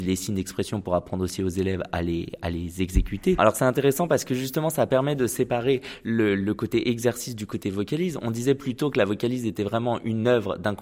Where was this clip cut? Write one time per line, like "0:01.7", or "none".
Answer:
0:03.4